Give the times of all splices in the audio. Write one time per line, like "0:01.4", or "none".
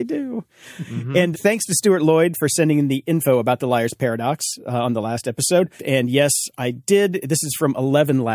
0:01.3
0:05.8